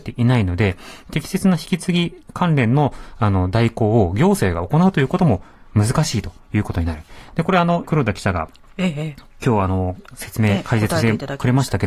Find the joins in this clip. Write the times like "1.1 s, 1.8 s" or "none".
7.8 s